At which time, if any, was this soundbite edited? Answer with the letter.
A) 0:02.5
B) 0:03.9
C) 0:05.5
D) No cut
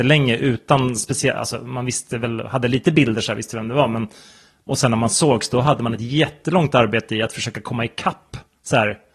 D